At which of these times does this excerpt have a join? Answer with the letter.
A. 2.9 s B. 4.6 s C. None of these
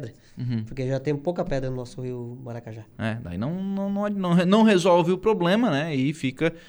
A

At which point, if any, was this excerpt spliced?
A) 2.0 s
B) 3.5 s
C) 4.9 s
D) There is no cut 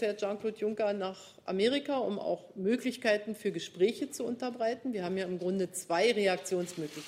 D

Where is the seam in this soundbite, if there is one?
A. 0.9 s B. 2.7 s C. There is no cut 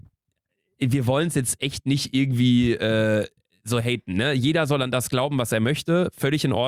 C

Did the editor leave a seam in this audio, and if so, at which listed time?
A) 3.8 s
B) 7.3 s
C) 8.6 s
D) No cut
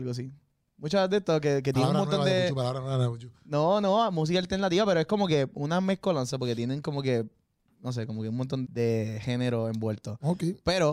C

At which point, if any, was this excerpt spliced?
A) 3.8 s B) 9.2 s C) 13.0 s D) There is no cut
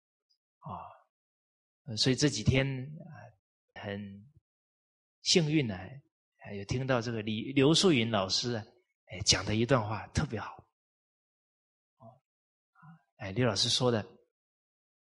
A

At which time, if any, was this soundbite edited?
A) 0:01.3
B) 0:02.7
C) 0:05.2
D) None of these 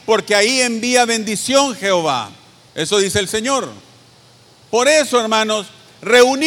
B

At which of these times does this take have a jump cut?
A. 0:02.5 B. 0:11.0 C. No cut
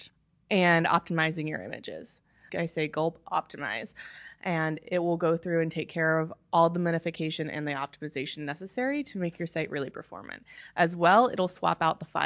A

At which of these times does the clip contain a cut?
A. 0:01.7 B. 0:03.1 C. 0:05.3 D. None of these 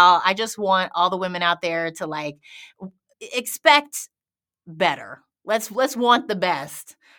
B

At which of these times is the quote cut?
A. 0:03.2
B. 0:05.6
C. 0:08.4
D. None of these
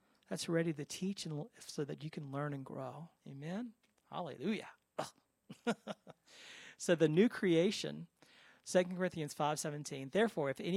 A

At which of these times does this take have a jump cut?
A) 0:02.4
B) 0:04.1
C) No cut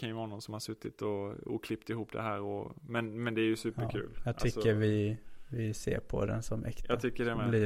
C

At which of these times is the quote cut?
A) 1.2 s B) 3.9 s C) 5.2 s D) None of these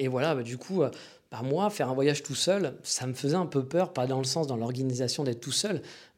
D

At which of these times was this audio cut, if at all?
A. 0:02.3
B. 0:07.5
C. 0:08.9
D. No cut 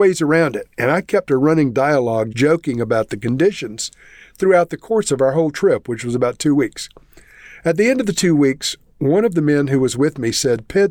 A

